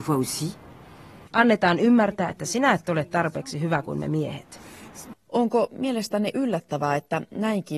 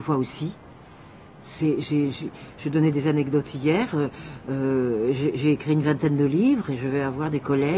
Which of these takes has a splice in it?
first; 2 cuts; at 1.3 s, 5.1 s

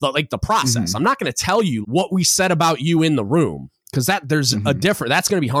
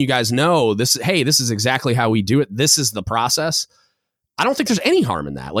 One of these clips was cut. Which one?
first; 1 cut; at 1.8 s

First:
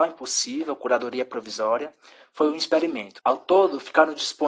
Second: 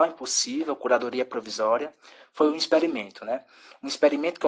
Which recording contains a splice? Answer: first; 1 cut; at 3.2 s

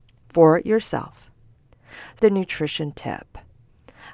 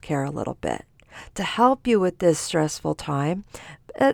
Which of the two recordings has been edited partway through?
first; 1 cut; at 2.2 s

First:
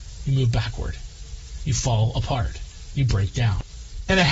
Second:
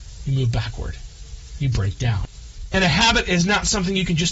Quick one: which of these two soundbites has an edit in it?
second; 1 cut; at 1.6 s

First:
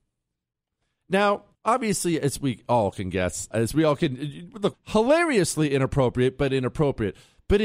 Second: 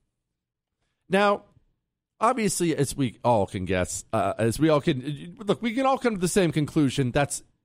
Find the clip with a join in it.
first; 3 cuts; at 1.6 s, 3.5 s, 4.7 s

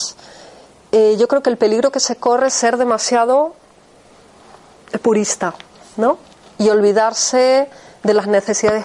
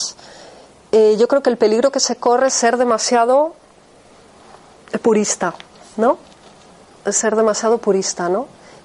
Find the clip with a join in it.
first; 1 cut; at 6.5 s

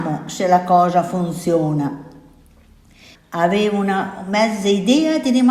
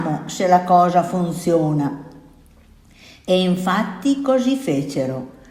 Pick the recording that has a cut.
first; 1 cut; at 3.1 s

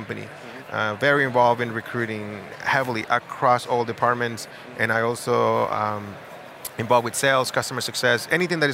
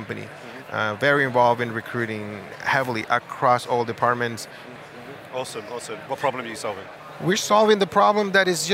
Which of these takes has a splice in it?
second; 2 cuts; at 4.8 s, 6.1 s

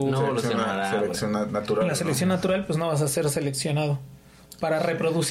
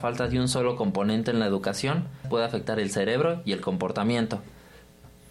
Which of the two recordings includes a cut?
second; 1 cut; at 2.2 s

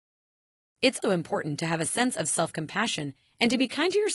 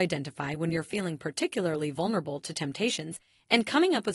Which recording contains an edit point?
first; 1 cut; at 1.0 s

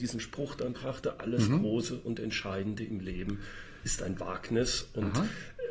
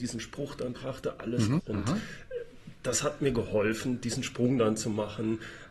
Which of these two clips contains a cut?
second; 1 cut; at 1.6 s

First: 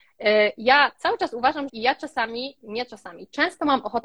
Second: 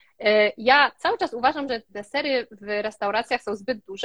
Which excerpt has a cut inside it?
first; 1 cut; at 1.7 s

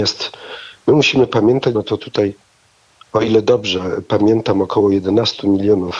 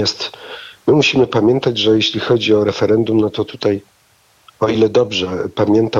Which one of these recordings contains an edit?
first; 1 cut; at 1.7 s

